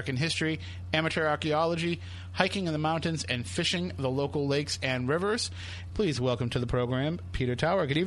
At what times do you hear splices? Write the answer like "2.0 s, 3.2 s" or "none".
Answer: 5.9 s